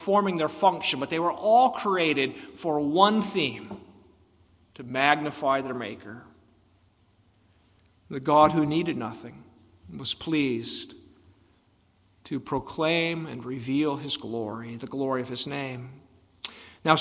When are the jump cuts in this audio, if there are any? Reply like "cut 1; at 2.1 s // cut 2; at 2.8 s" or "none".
none